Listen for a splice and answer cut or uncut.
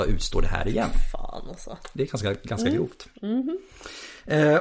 uncut